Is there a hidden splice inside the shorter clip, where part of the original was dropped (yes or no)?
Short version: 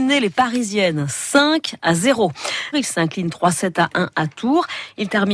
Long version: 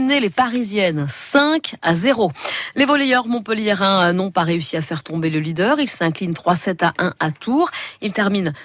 yes